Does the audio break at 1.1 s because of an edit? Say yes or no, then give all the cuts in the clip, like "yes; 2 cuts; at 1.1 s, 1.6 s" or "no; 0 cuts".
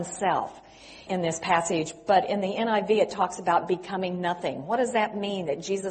yes; 1 cut; at 1.1 s